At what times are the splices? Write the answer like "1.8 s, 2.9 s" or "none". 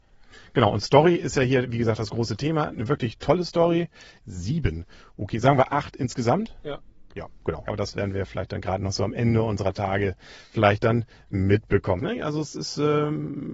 4.2 s, 7.6 s, 12.0 s